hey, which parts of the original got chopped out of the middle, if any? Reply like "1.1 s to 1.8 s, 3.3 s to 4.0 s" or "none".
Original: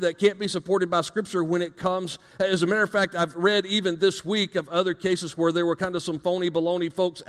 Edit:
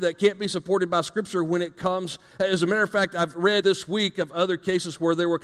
3.6 s to 4.0 s

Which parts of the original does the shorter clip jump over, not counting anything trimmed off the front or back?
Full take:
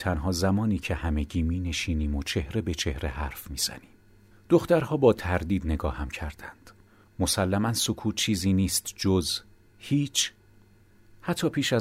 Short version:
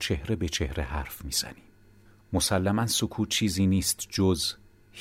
4.4 s to 7.0 s

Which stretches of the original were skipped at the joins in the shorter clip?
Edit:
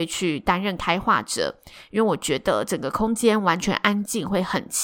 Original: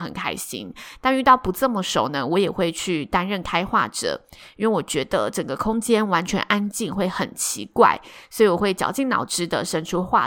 none

